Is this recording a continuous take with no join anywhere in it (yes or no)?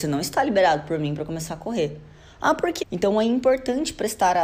no